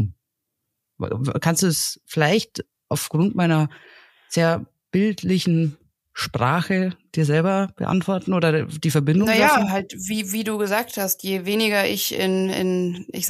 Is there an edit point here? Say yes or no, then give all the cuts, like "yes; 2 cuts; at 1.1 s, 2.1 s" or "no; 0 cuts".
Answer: no; 0 cuts